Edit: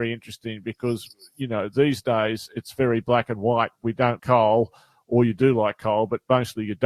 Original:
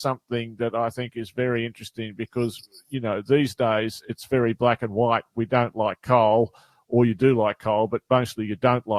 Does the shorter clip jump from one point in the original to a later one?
yes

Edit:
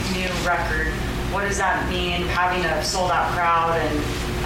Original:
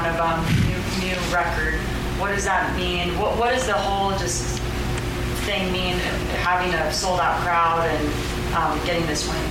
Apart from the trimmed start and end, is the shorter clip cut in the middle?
yes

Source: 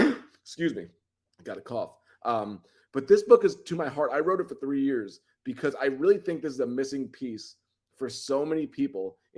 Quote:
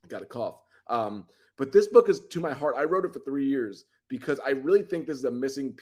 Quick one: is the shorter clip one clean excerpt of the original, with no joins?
yes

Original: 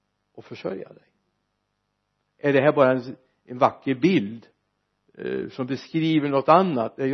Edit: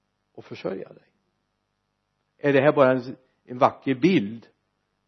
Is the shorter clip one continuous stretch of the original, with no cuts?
yes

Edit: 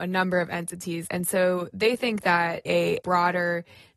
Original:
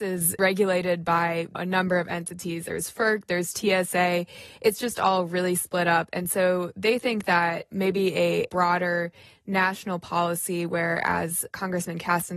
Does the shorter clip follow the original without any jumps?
no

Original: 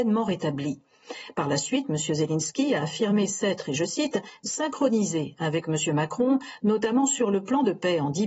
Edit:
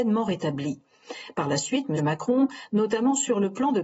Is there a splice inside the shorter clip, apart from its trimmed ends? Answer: yes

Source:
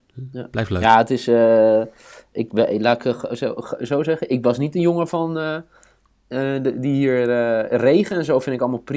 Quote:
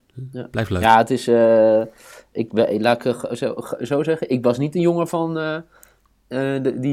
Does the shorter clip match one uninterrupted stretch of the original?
yes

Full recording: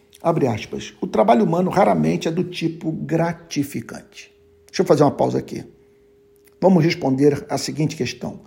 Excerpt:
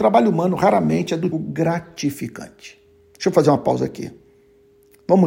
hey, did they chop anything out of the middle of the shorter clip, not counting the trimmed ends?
yes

